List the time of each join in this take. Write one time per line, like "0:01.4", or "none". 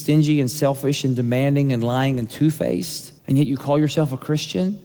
0:03.2